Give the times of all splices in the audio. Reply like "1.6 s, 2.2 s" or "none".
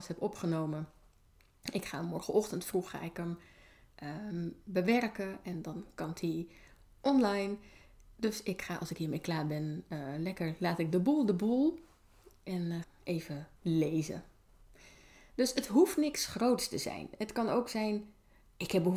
12.8 s